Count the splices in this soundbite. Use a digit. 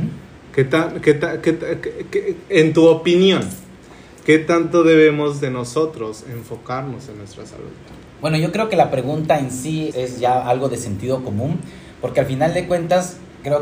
1